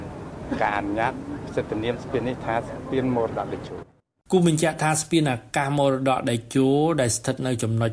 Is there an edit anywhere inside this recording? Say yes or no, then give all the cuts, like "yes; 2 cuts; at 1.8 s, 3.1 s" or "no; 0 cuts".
no; 0 cuts